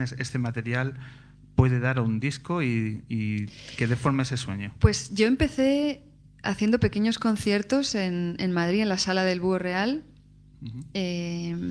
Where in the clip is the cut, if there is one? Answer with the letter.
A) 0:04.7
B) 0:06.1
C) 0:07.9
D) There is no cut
D